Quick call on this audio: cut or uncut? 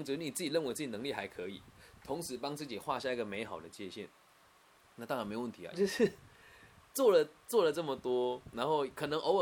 cut